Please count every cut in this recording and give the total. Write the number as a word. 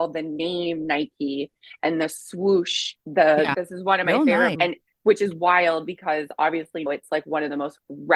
three